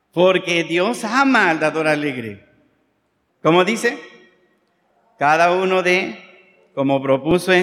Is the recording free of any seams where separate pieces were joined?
no; 1 cut; at 3.3 s

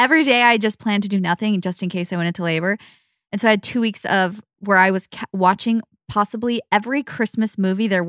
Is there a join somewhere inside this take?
no; 0 cuts

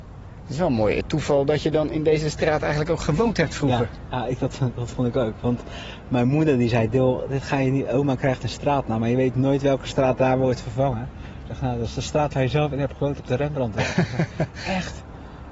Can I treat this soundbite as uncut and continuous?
yes; 0 cuts

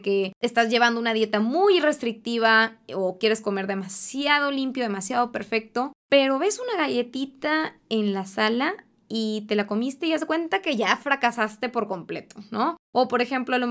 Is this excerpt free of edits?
yes; 0 cuts

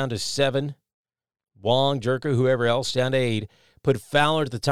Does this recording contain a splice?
no; 0 cuts

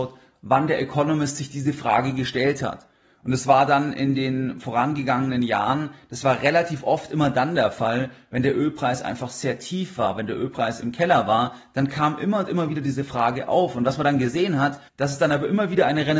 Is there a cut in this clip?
yes; 1 cut; at 14.9 s

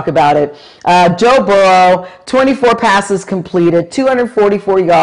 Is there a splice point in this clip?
no; 0 cuts

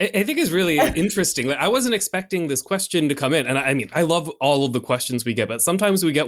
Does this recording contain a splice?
no; 0 cuts

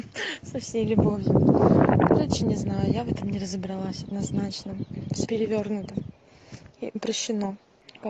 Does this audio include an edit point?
yes; 2 cuts; at 5.2 s, 7.0 s

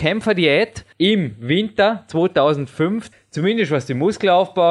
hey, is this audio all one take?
no; 2 cuts; at 0.9 s, 3.1 s

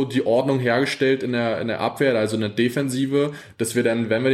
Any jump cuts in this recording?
no; 0 cuts

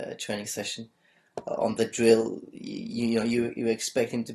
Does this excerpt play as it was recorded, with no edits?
yes; 0 cuts

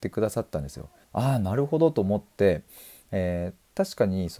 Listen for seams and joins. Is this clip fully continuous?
no; 1 cut; at 1.0 s

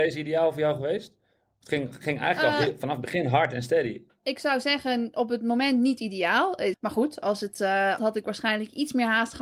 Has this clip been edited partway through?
yes; 2 cuts; at 6.7 s, 8.0 s

